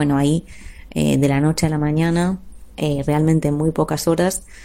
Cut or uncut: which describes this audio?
uncut